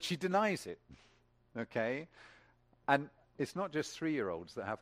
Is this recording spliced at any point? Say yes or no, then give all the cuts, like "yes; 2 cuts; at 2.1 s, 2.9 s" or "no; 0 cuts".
no; 0 cuts